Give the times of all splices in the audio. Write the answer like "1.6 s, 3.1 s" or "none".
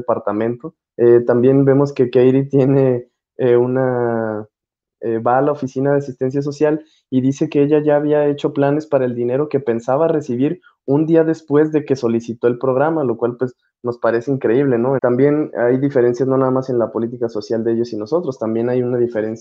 0.9 s, 15.0 s